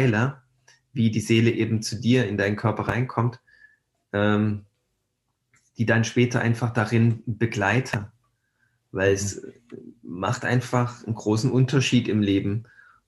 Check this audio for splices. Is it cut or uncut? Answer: uncut